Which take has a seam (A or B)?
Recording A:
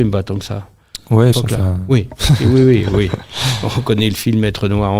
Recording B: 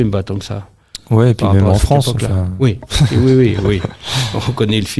A